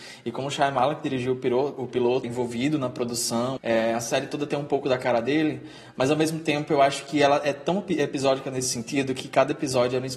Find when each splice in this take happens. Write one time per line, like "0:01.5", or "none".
0:02.2
0:03.6